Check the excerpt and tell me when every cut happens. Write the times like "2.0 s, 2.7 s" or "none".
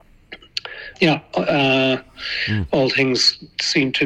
0.9 s